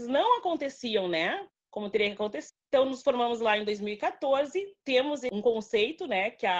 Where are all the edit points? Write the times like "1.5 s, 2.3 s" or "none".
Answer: 2.5 s

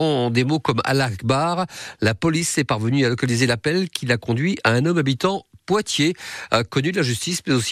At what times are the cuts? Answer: none

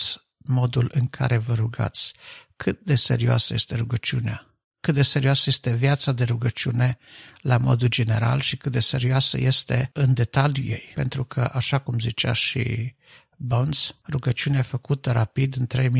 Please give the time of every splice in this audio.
none

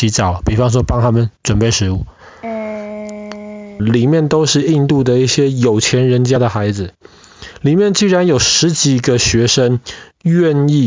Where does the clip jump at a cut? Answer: 3.8 s

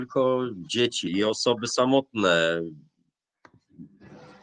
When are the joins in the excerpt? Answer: 1.1 s

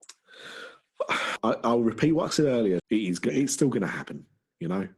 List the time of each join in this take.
1.4 s, 2.8 s

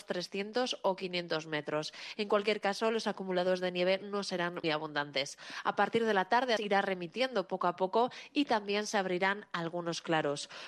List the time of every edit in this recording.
4.6 s, 6.6 s

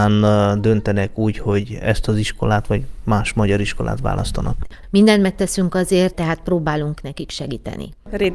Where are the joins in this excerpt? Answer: 4.8 s, 6.1 s

